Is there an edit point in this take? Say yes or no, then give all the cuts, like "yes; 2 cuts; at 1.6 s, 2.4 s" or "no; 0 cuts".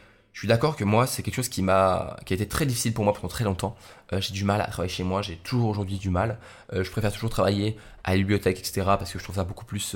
no; 0 cuts